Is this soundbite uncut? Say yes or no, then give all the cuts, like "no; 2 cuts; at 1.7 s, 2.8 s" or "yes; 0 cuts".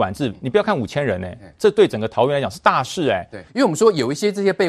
no; 1 cut; at 3.5 s